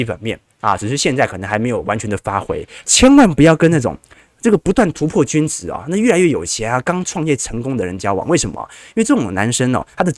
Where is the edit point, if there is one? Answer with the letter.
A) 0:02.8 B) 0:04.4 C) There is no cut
A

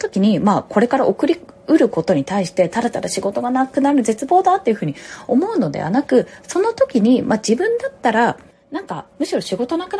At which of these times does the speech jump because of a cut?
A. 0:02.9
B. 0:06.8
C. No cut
C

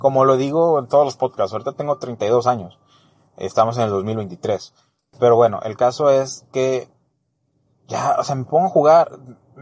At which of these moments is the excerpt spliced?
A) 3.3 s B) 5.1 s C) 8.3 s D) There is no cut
B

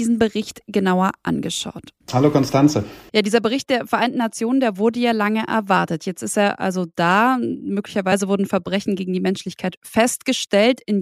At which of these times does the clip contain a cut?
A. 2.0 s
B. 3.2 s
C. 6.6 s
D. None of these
A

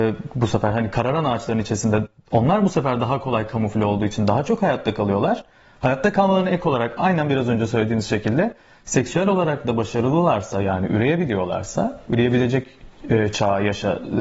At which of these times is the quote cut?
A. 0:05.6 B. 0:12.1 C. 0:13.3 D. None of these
D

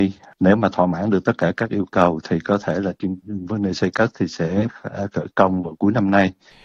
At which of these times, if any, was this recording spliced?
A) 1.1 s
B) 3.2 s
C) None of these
B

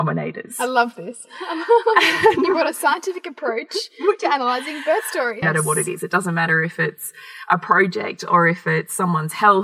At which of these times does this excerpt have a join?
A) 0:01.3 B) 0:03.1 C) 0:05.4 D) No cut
C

